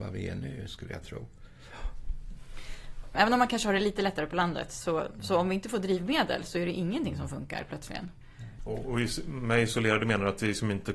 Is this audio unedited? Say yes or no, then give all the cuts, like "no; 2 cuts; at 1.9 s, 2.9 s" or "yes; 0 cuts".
no; 2 cuts; at 3.1 s, 8.6 s